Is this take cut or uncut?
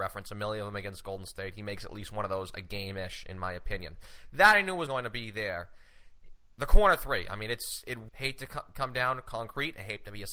cut